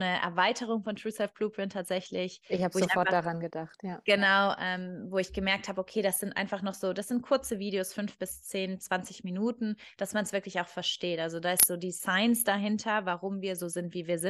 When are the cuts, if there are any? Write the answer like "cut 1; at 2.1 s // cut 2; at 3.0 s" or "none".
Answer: none